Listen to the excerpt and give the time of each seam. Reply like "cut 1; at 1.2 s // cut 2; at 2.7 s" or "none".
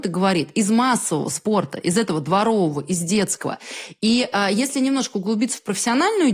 none